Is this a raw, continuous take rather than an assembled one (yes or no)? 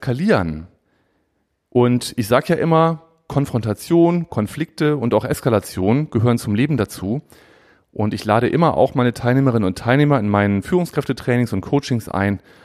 yes